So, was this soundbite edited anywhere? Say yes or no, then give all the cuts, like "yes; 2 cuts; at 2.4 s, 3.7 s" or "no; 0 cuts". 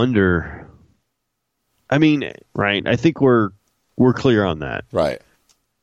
yes; 1 cut; at 2.5 s